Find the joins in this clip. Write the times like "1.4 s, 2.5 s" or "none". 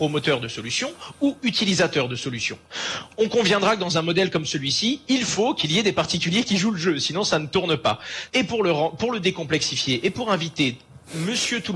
8.3 s